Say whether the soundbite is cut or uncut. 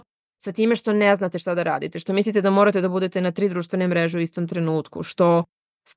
uncut